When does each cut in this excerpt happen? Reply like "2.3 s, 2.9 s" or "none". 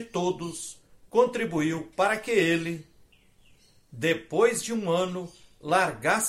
none